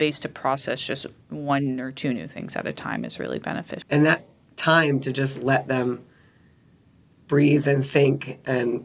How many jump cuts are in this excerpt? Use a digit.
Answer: 1